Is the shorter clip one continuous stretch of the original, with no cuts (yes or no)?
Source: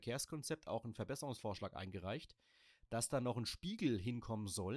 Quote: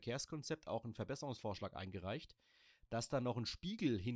yes